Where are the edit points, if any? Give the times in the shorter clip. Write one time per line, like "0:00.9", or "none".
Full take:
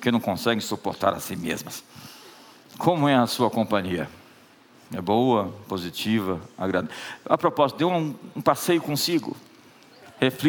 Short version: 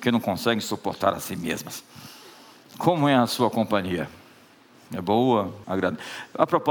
0:05.6